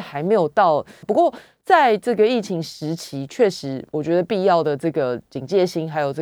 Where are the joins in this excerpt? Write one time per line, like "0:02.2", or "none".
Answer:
0:01.0